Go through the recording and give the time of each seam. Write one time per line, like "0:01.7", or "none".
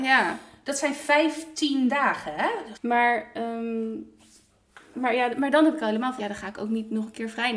0:02.7
0:04.9
0:06.2